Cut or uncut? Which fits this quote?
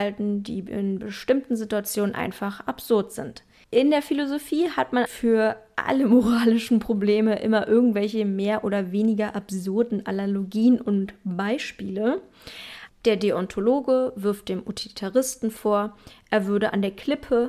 cut